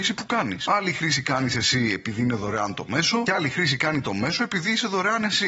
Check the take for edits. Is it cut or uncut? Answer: uncut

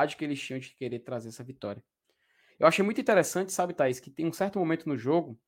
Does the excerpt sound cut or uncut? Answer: uncut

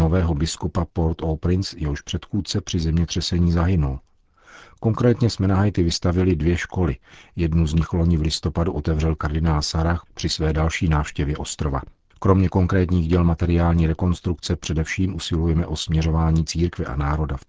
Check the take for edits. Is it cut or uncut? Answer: uncut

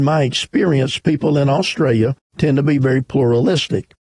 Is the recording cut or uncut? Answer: uncut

